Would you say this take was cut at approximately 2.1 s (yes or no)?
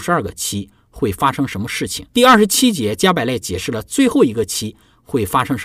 yes